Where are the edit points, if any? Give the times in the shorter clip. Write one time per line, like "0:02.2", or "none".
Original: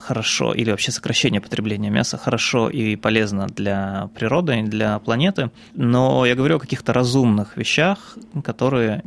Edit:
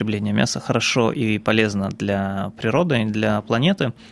none